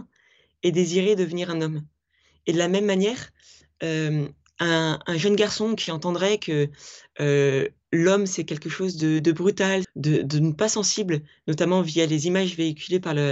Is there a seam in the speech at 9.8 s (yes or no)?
yes